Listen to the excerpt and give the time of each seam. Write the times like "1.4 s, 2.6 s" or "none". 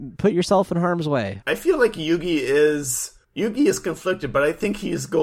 1.4 s, 3.2 s